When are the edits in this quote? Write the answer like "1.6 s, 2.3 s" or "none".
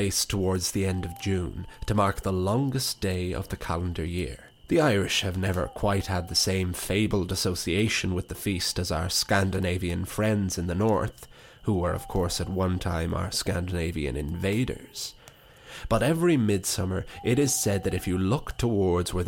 4.6 s